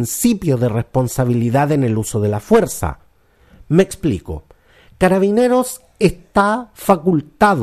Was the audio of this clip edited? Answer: no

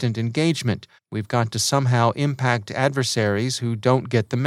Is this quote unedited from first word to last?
no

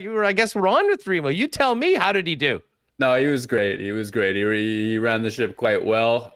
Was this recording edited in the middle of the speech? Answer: no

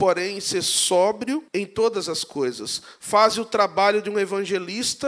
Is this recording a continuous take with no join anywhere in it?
no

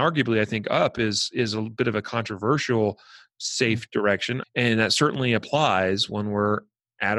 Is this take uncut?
no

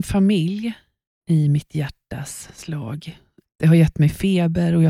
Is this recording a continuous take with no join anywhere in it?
no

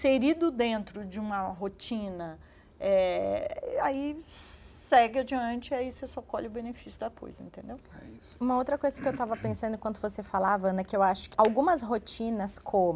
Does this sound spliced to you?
yes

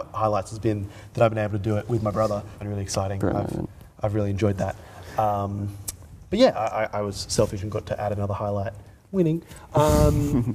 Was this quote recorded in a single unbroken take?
no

